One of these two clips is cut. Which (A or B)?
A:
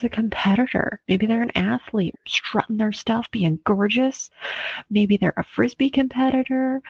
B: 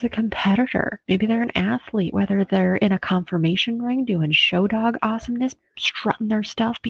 A